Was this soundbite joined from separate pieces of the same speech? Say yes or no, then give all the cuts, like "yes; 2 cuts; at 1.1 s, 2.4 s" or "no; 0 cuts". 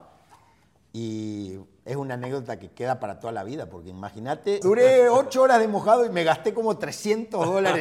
yes; 1 cut; at 4.6 s